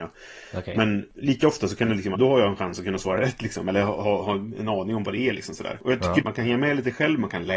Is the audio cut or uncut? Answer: cut